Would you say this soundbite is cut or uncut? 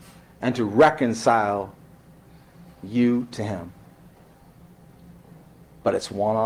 uncut